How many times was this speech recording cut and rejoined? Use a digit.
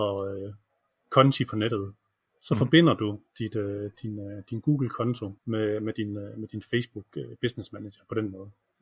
1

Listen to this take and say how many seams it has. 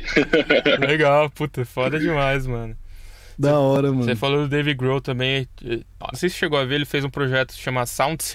1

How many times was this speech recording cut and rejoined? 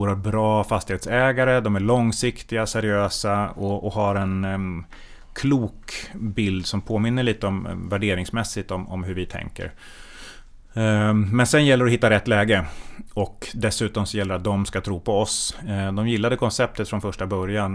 0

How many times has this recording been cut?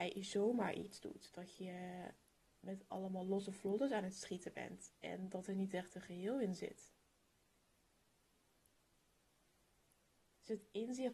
0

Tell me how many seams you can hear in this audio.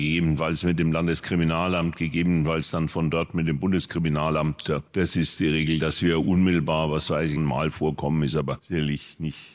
1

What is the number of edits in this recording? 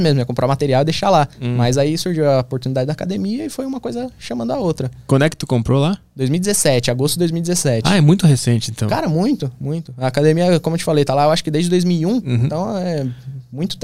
0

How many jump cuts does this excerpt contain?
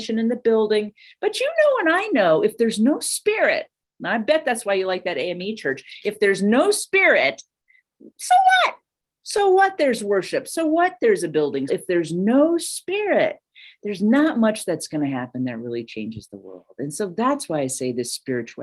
1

